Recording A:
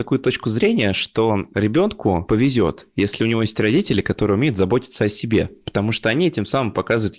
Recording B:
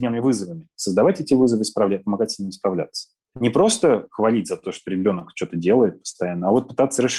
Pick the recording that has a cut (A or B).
B